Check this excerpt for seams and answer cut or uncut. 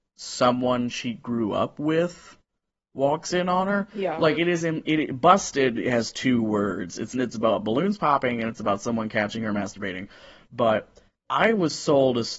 uncut